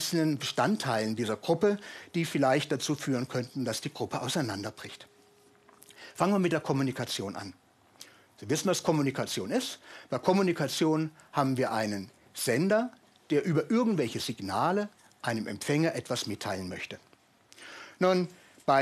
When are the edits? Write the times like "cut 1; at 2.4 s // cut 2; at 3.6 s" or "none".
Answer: none